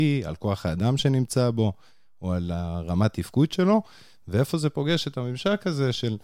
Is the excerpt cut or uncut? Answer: uncut